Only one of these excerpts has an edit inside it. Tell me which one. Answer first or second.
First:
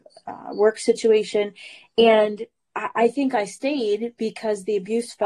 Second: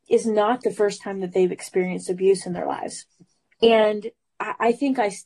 second